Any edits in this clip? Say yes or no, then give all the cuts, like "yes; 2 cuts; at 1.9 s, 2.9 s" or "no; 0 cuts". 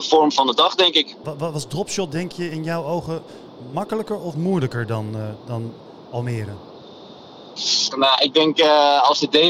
yes; 2 cuts; at 1.2 s, 7.9 s